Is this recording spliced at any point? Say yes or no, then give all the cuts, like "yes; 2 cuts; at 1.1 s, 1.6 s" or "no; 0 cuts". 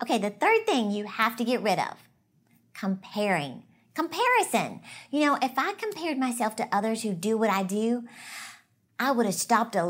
no; 0 cuts